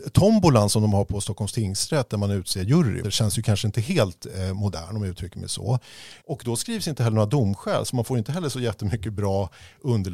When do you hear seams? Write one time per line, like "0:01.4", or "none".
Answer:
0:03.0
0:06.2